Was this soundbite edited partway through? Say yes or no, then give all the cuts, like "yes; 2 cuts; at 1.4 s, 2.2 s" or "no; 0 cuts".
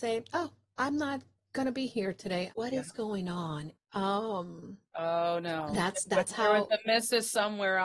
yes; 2 cuts; at 2.5 s, 3.7 s